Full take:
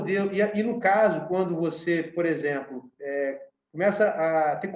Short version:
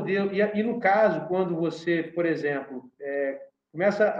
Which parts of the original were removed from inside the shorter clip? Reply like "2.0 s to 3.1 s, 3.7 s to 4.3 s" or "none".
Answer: none